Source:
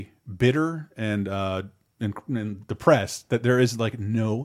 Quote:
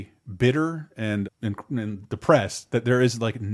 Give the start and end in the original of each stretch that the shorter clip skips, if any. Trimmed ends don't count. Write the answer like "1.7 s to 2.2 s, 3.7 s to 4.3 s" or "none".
1.2 s to 1.8 s